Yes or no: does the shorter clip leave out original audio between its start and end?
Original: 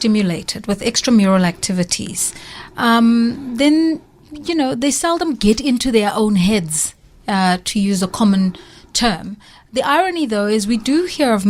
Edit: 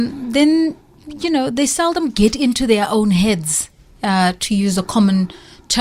no